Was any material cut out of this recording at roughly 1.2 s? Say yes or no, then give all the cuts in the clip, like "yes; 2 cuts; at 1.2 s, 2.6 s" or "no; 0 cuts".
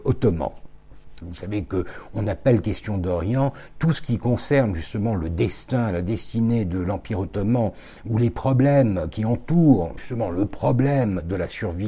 yes; 2 cuts; at 1.2 s, 10.0 s